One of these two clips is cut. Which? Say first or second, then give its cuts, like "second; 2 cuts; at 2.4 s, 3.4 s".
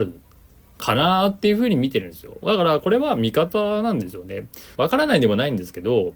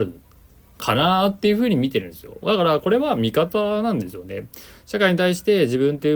first; 1 cut; at 4.7 s